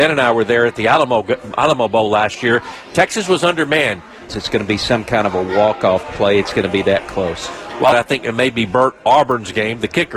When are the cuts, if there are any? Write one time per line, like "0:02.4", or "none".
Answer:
0:04.3
0:07.9